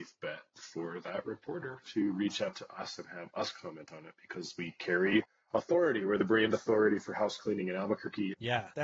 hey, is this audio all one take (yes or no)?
yes